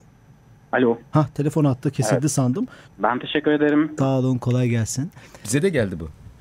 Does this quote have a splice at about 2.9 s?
yes; 2 cuts; at 2.9 s, 4.0 s

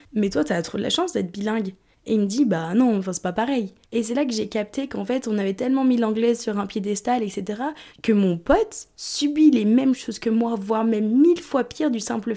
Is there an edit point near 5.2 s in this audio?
no; 3 cuts; at 1.9 s, 3.8 s, 7.9 s

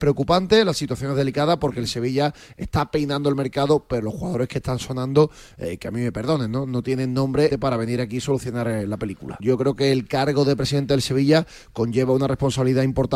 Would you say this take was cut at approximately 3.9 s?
no; 2 cuts; at 7.5 s, 9.4 s

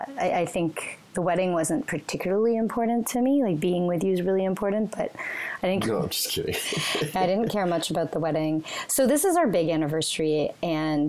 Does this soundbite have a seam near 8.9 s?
no; 1 cut; at 5.8 s

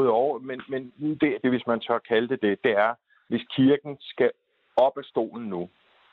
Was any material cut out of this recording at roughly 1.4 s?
yes; 1 cut; at 1.4 s

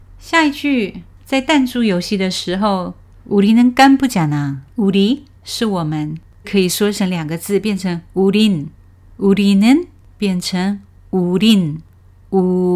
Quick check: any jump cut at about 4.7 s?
yes; 3 cuts; at 3.1 s, 4.7 s, 6.4 s

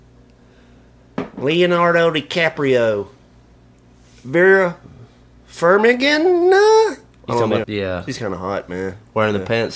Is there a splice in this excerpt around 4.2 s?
no; 1 cut; at 7.6 s

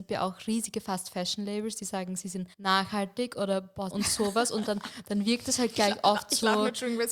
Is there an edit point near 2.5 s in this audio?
yes; 2 cuts; at 2.5 s, 3.9 s

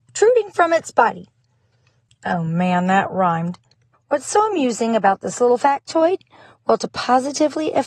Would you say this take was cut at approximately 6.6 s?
no; 2 cuts; at 2.1 s, 3.9 s

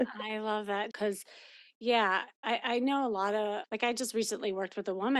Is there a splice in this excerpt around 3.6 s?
yes; 2 cuts; at 0.9 s, 3.6 s

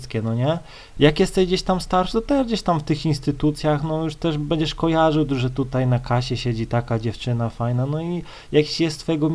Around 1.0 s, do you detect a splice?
yes; 1 cut; at 1.0 s

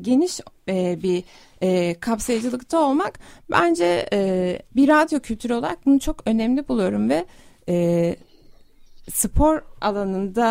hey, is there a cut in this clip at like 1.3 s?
no; 1 cut; at 4.7 s

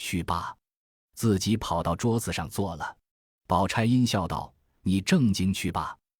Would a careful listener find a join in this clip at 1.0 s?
no; 1 cut; at 3.1 s

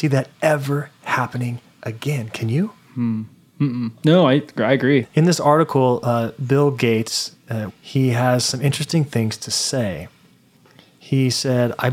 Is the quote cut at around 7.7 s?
yes; 2 cuts; at 5.0 s, 7.7 s

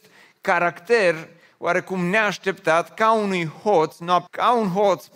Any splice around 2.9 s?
no; 1 cut; at 4.3 s

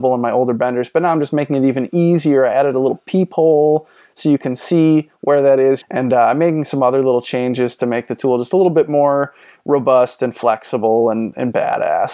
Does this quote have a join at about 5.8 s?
yes; 1 cut; at 5.8 s

